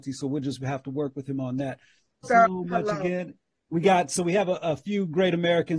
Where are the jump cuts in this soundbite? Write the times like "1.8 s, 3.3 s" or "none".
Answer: 2.2 s